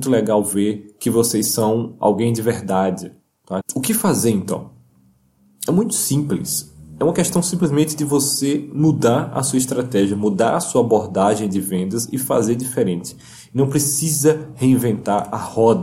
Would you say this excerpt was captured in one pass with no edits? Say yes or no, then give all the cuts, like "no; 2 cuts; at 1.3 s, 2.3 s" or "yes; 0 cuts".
no; 1 cut; at 3.6 s